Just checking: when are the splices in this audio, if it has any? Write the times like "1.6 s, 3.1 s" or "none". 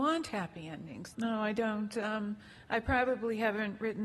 1.1 s